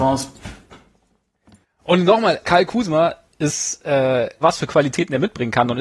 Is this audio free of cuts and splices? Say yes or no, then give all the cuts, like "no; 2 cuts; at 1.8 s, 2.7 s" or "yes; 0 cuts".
no; 2 cuts; at 2.4 s, 4.4 s